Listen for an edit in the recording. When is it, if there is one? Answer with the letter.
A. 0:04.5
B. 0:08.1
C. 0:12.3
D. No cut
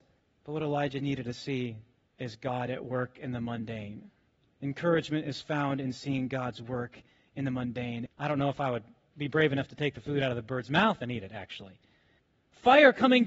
B